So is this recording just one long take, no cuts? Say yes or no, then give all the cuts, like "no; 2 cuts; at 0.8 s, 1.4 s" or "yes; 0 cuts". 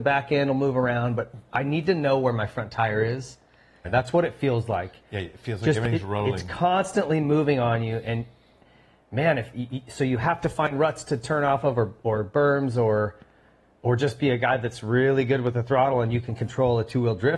no; 1 cut; at 3.8 s